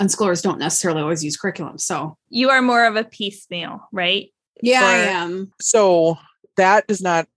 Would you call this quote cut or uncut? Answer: cut